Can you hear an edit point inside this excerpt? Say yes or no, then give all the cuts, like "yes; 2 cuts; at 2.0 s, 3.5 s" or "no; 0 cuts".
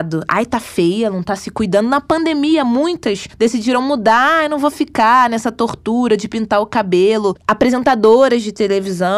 no; 0 cuts